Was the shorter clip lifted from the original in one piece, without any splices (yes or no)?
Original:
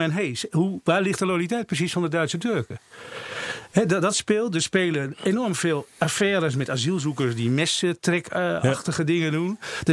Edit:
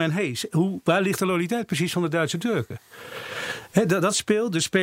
yes